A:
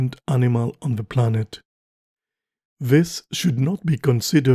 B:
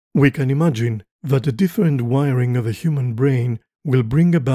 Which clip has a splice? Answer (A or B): A